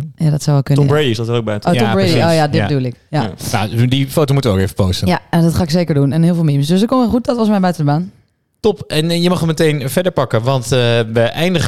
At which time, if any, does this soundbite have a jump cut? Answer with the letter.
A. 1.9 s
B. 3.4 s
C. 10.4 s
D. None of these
D